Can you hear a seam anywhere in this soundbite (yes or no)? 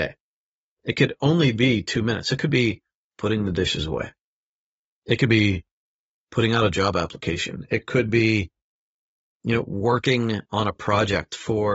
no